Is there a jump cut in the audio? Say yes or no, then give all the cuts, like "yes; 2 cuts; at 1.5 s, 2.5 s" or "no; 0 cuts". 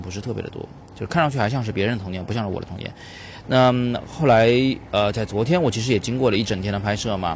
yes; 1 cut; at 3.4 s